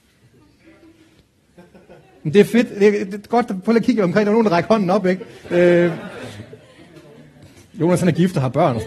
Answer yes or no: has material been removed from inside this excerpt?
yes